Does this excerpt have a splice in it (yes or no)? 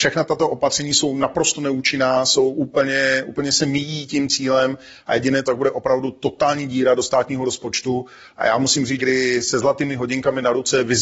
yes